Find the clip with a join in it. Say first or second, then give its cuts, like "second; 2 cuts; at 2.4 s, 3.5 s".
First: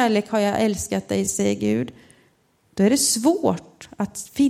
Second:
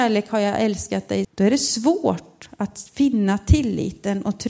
second; 1 cut; at 1.2 s